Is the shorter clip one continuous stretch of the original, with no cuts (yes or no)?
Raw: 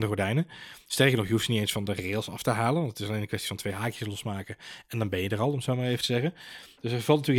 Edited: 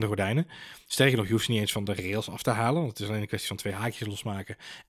yes